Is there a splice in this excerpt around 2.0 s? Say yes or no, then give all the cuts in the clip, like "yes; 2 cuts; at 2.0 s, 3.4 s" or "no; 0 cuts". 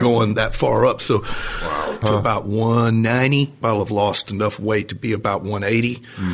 yes; 2 cuts; at 2.0 s, 3.6 s